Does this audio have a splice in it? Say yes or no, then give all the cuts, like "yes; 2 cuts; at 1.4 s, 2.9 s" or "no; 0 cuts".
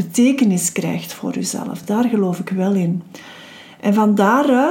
no; 0 cuts